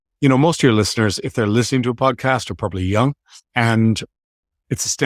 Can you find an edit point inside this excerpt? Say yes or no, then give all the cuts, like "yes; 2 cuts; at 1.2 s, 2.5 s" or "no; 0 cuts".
yes; 1 cut; at 3.4 s